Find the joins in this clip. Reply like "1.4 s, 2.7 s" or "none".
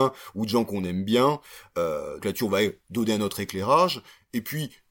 2.2 s